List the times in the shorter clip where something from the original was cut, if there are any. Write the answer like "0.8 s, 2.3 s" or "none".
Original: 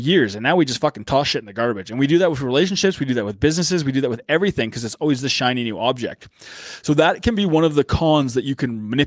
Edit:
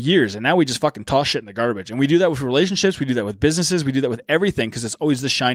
none